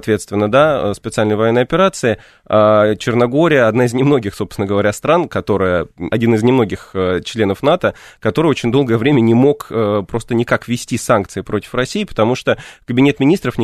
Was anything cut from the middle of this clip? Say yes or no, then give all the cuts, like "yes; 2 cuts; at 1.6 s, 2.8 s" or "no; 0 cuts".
yes; 1 cut; at 6.1 s